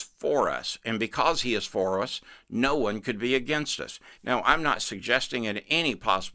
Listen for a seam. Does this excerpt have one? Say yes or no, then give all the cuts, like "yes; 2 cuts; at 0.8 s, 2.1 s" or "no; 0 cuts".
yes; 1 cut; at 4.2 s